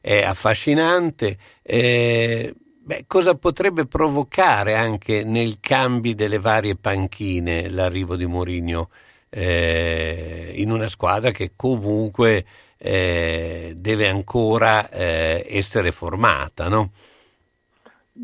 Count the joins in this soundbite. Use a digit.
0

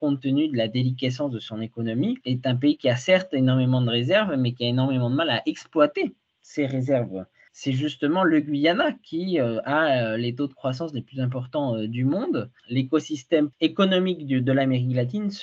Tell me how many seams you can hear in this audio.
1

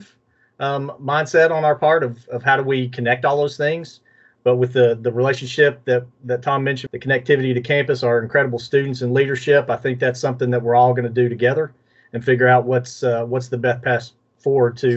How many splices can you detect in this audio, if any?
1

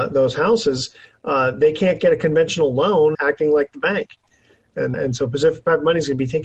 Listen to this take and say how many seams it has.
2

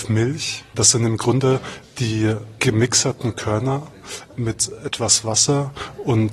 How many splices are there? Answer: 1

